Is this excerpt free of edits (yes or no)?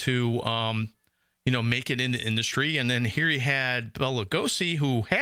yes